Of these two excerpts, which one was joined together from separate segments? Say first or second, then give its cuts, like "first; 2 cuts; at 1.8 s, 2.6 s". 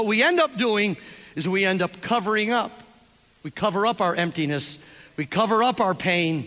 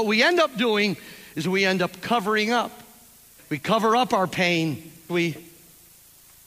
second; 2 cuts; at 3.4 s, 5.1 s